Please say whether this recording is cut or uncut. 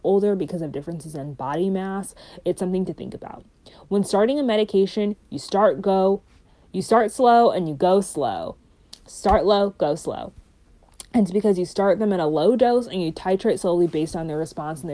uncut